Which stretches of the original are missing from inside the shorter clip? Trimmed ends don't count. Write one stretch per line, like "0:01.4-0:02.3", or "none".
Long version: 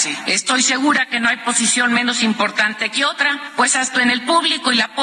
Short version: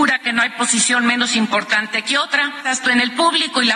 0:03.5-0:03.7